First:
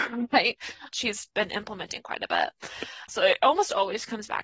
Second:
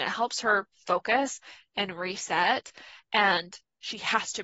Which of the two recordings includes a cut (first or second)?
first